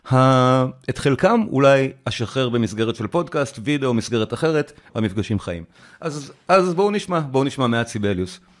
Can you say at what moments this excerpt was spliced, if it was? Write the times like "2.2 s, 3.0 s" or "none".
4.9 s